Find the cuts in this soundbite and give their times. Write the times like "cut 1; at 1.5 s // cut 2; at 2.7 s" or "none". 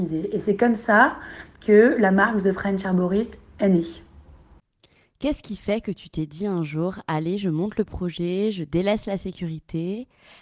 none